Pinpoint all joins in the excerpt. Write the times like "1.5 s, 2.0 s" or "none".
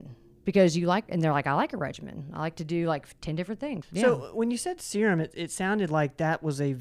3.8 s